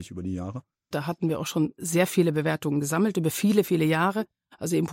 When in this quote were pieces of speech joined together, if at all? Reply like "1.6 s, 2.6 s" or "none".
0.9 s